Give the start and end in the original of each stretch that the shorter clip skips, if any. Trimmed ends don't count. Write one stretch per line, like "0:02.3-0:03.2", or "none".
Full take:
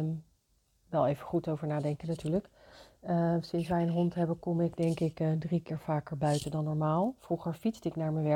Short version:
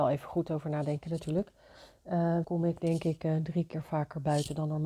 0:03.4-0:04.4